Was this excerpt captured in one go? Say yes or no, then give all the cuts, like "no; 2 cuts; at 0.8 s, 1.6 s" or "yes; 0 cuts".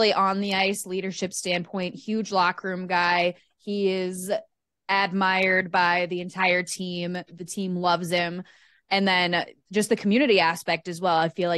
yes; 0 cuts